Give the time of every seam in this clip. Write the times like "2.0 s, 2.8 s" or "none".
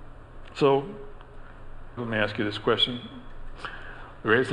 2.0 s, 3.6 s